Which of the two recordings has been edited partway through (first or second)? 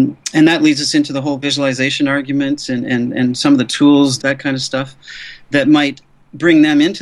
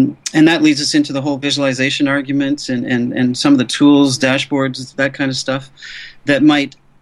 first